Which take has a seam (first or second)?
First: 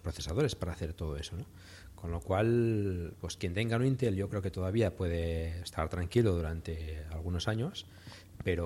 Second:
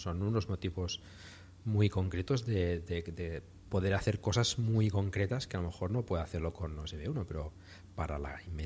first